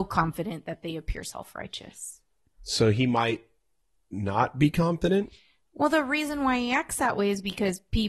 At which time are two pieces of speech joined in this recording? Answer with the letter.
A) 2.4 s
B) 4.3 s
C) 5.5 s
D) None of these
D